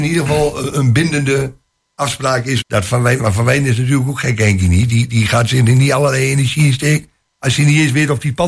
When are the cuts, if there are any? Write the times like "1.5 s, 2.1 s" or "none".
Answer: 2.6 s

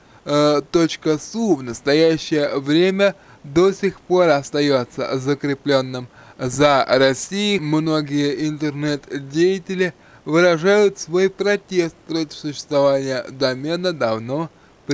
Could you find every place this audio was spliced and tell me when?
7.6 s

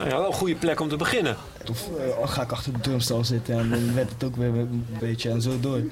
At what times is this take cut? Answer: 1.6 s, 5.0 s

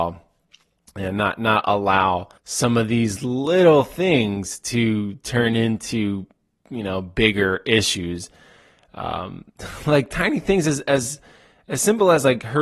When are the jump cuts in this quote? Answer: 2.4 s

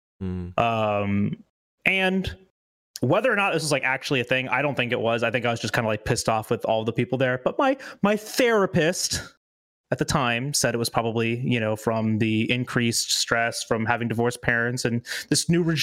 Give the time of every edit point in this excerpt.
none

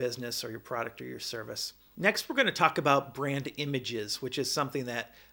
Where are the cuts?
1.9 s

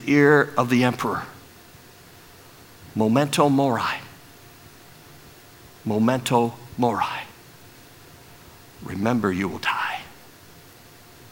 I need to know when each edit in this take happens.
none

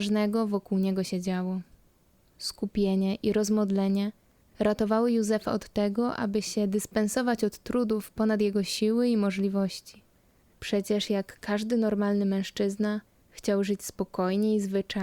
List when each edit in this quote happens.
none

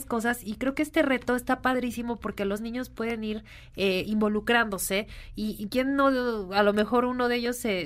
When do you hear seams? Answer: 5.7 s

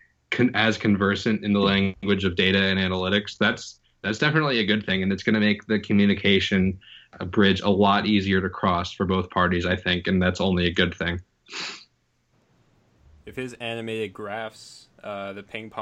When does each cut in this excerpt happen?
none

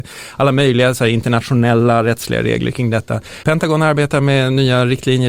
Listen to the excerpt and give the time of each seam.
3.4 s

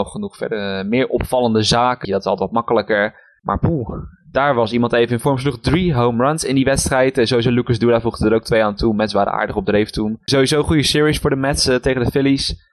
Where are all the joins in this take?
2.0 s, 10.3 s

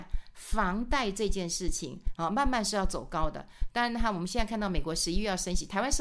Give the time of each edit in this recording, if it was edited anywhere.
2.2 s

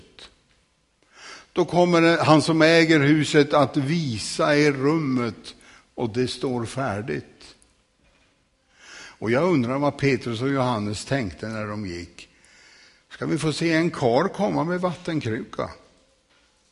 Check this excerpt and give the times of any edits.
none

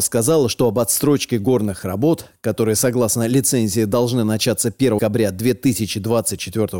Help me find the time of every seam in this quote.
5.0 s

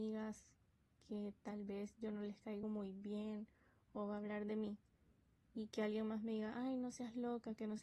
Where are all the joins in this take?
none

